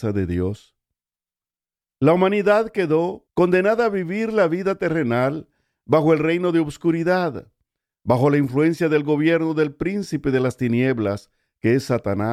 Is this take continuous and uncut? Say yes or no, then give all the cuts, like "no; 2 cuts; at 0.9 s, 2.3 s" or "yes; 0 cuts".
no; 1 cut; at 3.3 s